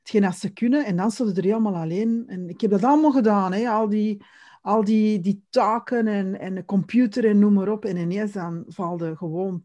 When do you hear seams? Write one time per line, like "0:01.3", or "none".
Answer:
none